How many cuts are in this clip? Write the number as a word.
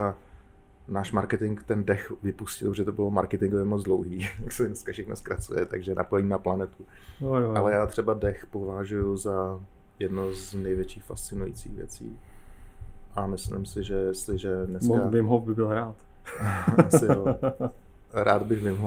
zero